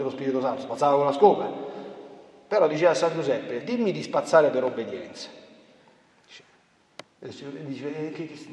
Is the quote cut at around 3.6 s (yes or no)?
yes